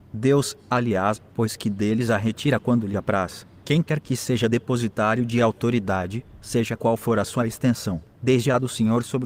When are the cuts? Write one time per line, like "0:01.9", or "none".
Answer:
0:01.3
0:03.6